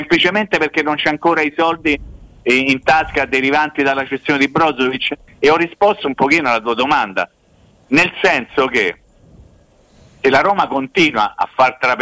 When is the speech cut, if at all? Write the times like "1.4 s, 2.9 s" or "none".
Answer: 5.3 s